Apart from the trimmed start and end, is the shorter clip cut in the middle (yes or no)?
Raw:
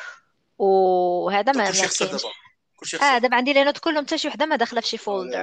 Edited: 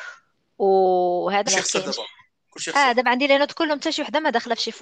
yes